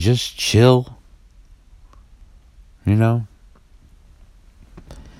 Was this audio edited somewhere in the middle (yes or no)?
no